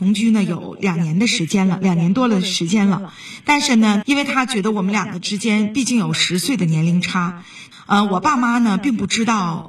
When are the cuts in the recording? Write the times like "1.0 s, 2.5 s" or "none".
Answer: 4.0 s, 7.7 s